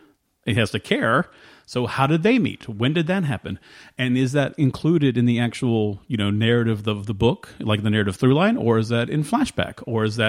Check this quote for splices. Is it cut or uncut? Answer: uncut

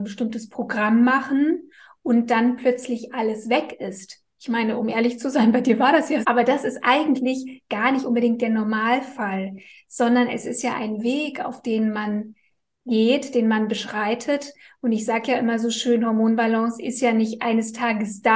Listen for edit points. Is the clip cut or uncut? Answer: cut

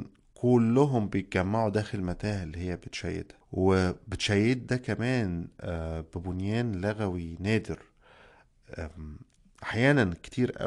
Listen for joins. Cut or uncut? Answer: cut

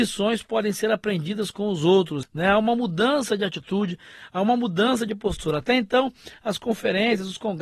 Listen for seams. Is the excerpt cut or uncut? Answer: cut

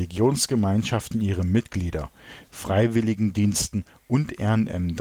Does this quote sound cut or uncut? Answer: cut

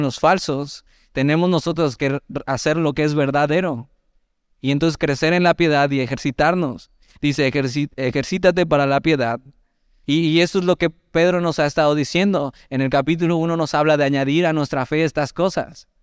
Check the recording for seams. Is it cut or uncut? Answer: cut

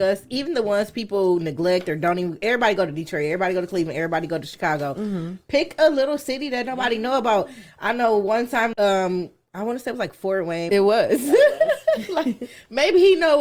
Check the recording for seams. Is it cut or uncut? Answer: cut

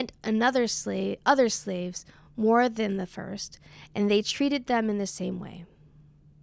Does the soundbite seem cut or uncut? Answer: uncut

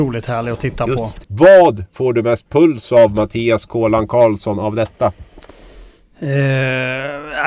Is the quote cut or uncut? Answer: cut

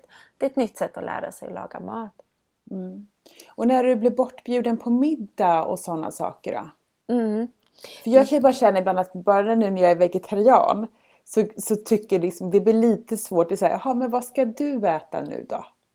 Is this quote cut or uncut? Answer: uncut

